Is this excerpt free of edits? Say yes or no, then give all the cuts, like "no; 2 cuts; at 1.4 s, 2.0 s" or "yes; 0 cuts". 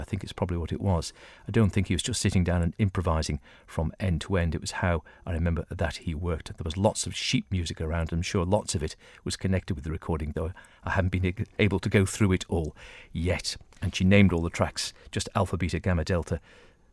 yes; 0 cuts